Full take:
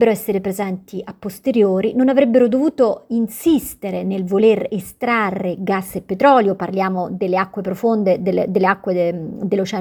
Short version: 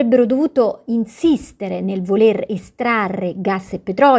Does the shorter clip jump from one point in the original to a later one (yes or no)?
no